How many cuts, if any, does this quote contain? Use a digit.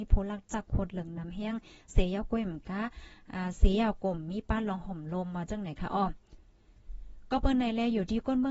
0